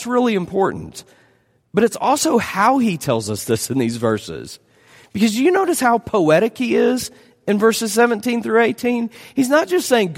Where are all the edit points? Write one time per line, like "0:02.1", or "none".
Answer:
none